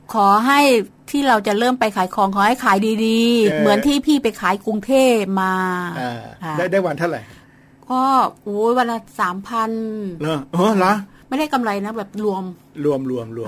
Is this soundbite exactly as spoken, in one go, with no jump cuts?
no; 1 cut; at 3.5 s

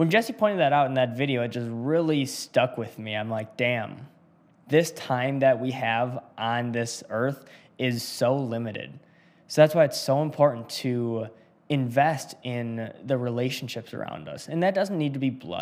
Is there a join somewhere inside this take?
no; 0 cuts

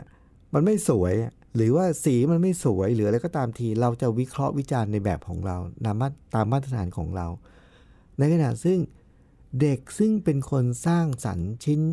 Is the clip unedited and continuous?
yes; 0 cuts

